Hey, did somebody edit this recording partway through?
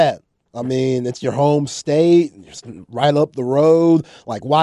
no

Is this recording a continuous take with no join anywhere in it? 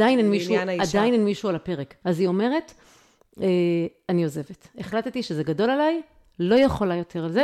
no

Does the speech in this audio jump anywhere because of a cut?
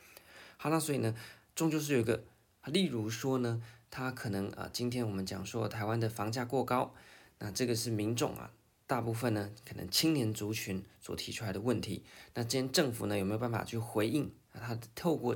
yes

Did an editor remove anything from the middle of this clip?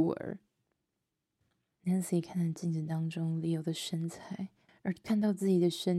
yes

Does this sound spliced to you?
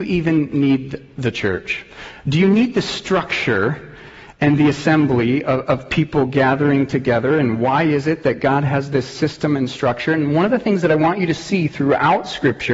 no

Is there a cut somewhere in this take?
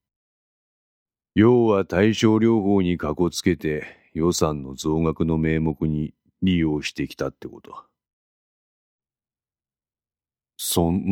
no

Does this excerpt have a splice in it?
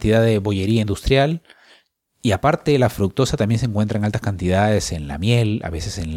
no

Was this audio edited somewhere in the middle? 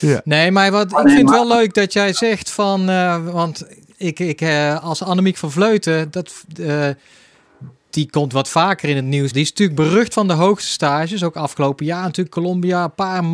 yes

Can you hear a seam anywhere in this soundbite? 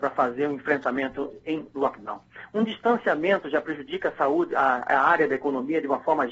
no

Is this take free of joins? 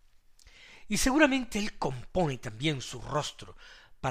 yes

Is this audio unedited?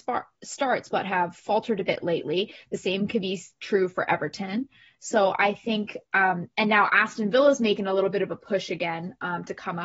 yes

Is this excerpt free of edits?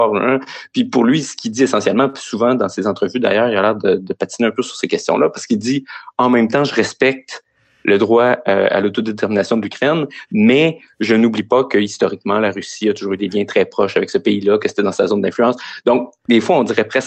yes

